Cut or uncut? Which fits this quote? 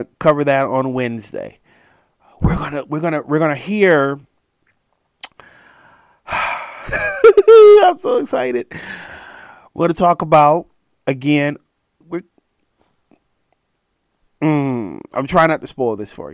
cut